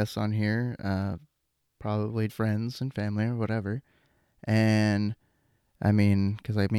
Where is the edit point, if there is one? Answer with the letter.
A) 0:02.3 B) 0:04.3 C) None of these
A